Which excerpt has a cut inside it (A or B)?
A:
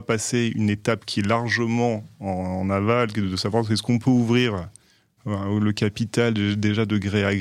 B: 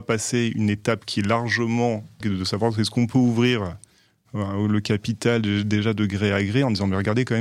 B